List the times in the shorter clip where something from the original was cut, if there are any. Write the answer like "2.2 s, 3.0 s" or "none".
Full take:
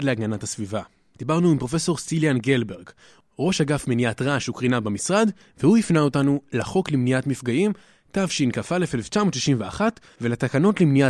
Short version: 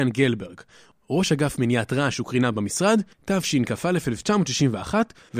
3.1 s